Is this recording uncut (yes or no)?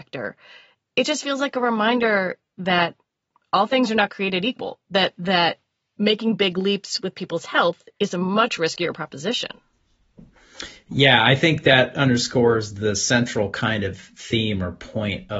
yes